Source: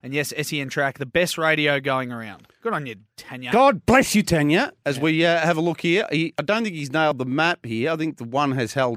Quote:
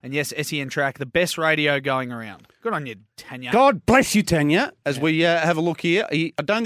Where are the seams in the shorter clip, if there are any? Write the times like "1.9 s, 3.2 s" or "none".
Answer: none

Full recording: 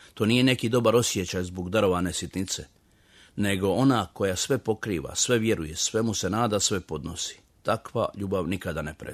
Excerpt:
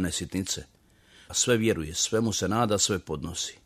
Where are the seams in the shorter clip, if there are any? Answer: 1.3 s

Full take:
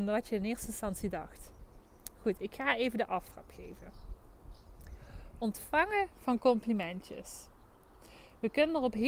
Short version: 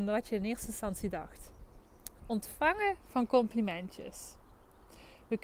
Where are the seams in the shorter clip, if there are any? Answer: 2.2 s

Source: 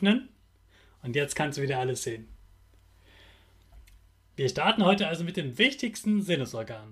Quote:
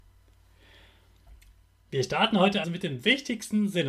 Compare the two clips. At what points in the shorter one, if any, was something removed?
2.6 s

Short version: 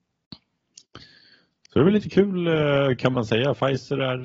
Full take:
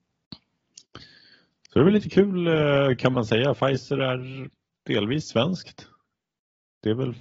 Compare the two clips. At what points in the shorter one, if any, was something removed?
none

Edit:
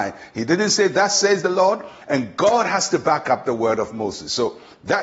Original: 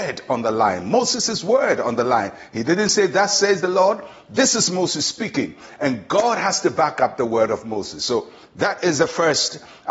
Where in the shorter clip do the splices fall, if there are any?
2.0 s

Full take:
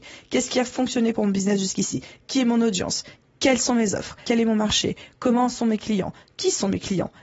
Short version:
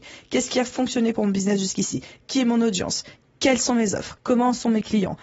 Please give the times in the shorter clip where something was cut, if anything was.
4.2 s

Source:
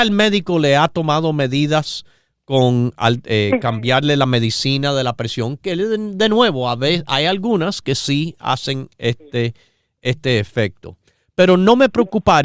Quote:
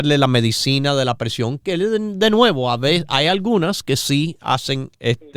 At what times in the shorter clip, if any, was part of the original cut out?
none

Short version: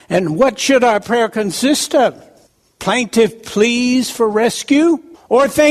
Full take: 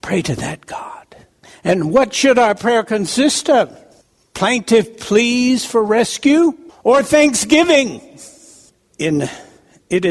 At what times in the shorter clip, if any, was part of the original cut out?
none

